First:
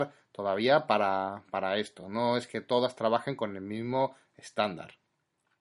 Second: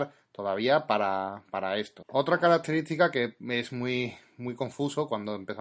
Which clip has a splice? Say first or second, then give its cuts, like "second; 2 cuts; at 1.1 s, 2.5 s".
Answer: second; 1 cut; at 2.0 s